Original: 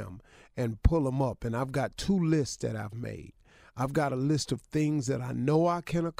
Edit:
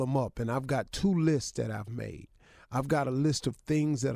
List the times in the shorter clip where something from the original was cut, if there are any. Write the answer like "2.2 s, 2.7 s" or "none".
none